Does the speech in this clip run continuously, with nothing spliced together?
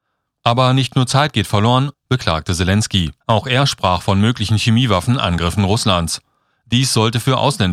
no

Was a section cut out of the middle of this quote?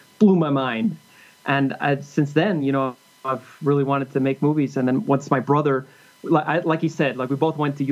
no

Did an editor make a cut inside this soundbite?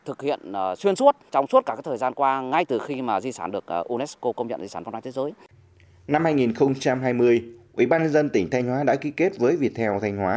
yes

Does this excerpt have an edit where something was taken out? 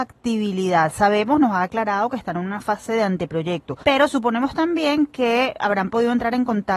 yes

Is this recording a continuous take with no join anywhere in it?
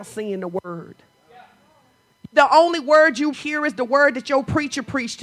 no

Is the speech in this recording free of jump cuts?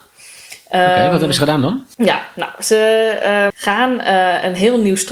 no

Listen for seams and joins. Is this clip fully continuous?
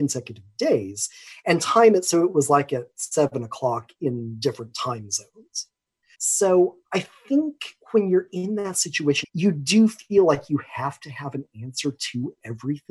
no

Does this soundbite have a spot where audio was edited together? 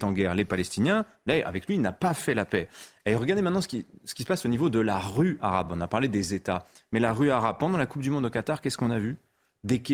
no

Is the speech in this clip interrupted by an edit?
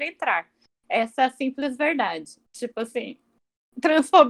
yes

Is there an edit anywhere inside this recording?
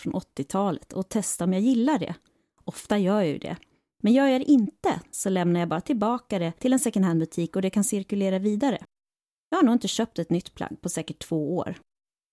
no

